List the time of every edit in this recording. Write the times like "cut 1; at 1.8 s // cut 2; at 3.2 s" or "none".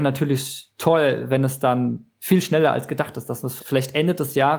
cut 1; at 2.1 s // cut 2; at 3.6 s